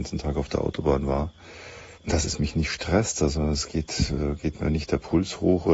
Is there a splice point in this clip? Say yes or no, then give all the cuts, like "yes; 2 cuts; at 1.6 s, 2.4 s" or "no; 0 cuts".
yes; 1 cut; at 1.9 s